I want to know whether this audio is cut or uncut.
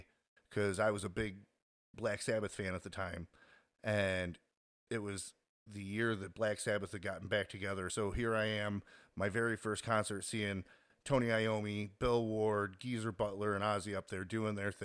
uncut